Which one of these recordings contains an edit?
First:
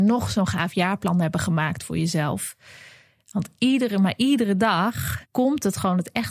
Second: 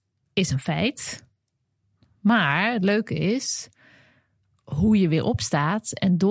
first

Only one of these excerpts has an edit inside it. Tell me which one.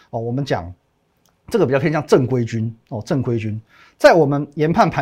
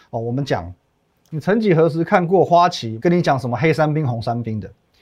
second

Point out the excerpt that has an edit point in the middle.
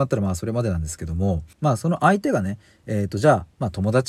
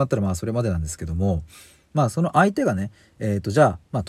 first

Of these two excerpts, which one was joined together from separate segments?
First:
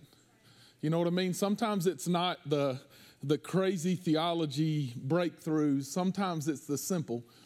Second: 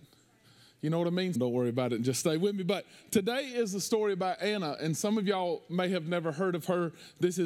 second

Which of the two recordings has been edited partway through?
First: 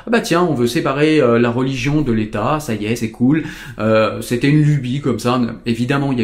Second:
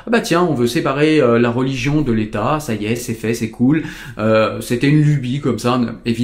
first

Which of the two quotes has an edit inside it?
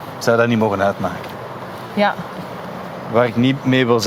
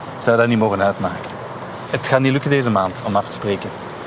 second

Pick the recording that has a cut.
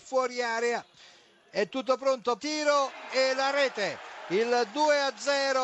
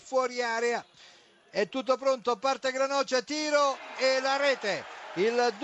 first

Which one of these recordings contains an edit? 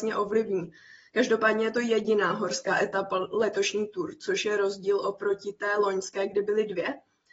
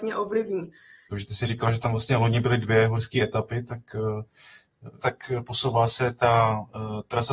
second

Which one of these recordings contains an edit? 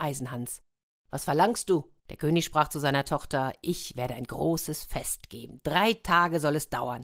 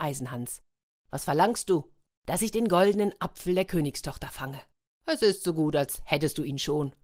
first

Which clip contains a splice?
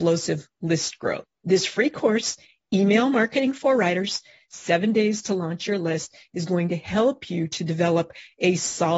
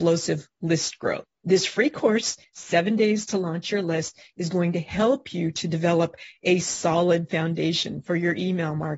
second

